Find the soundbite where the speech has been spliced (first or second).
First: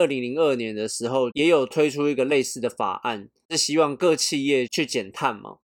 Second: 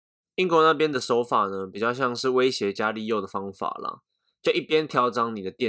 first